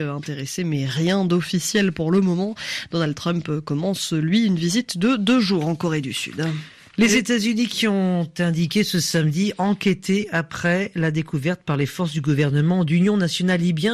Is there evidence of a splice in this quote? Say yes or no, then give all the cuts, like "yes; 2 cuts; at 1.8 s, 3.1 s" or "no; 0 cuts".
no; 0 cuts